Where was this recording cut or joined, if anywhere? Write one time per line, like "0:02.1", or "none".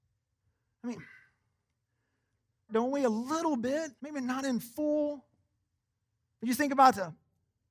0:02.7
0:04.0